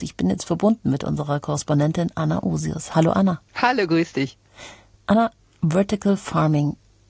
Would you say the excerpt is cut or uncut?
cut